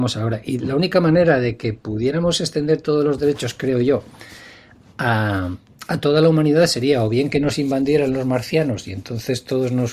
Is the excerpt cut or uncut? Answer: uncut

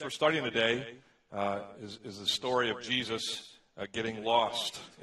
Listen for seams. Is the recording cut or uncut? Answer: uncut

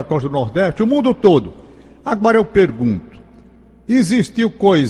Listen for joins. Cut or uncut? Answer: uncut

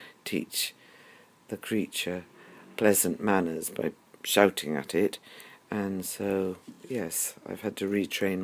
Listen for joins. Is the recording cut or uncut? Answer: uncut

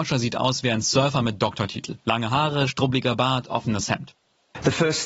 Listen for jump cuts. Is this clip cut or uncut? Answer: uncut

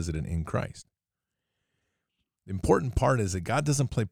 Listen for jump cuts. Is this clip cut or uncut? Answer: uncut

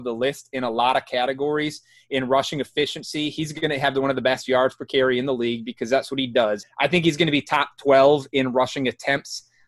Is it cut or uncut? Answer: cut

